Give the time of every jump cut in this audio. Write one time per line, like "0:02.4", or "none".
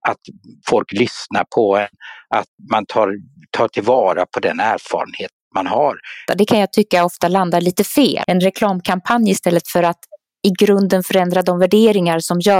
0:02.6
0:06.3
0:08.2